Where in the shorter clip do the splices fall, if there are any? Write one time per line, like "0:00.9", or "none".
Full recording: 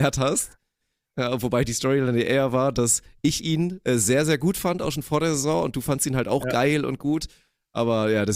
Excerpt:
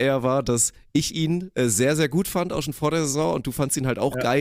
none